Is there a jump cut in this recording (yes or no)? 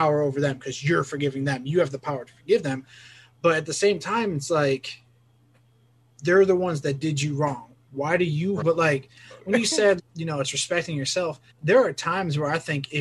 yes